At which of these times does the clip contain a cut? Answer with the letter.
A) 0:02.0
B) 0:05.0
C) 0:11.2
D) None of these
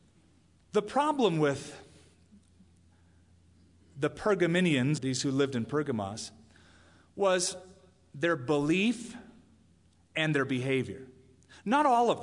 B